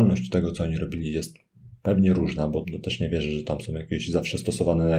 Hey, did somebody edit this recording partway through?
yes; 1 cut; at 2.6 s

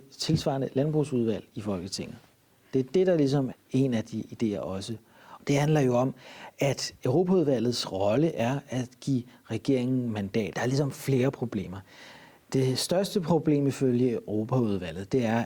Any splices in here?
yes; 3 cuts; at 3.5 s, 5.4 s, 10.5 s

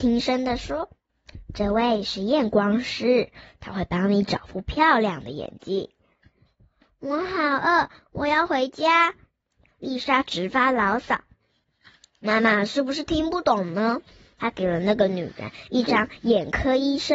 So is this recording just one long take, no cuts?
yes; 0 cuts

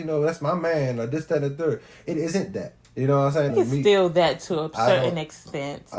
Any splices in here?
yes; 1 cut; at 3.5 s

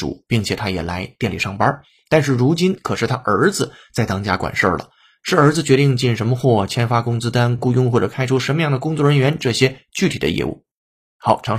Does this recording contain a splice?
no; 0 cuts

